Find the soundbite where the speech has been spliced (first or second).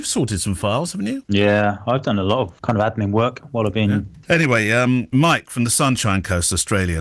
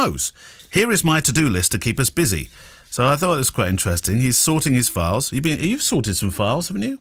first